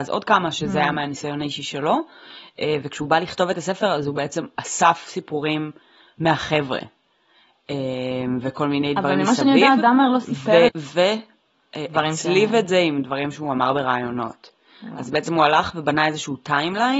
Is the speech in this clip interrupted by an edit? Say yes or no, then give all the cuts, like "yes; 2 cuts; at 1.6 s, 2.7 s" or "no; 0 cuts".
yes; 1 cut; at 10.7 s